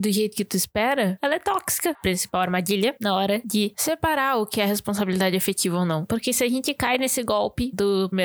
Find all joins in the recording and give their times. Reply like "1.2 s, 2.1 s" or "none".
1.9 s